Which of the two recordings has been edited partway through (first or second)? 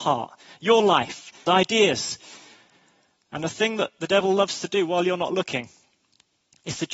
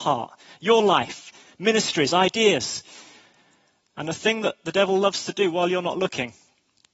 first